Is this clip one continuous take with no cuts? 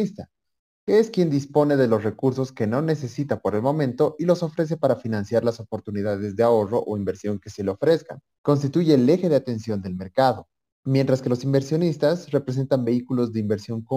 yes; 0 cuts

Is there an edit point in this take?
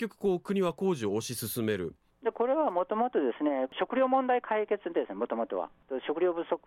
yes; 1 cut; at 2.1 s

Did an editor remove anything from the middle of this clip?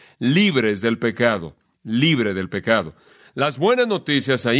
no; 0 cuts

